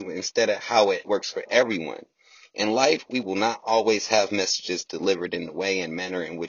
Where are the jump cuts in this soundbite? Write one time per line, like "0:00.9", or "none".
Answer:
0:01.0